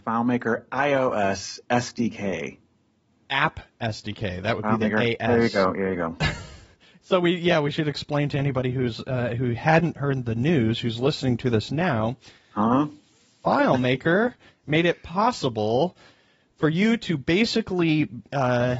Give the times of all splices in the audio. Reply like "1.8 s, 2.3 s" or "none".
none